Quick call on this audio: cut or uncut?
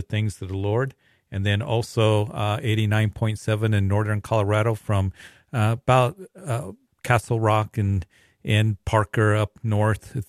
uncut